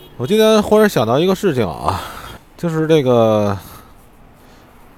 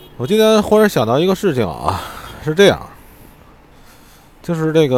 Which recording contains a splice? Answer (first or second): first